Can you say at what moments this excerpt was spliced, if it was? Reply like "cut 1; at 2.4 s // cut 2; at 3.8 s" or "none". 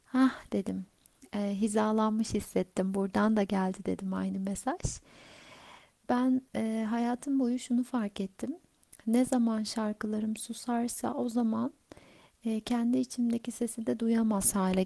cut 1; at 6.5 s